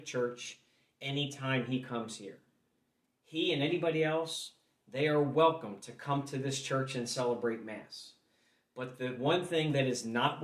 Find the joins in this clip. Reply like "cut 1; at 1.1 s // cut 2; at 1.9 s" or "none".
none